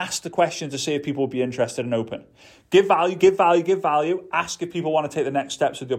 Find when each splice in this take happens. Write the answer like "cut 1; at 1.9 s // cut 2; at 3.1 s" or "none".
none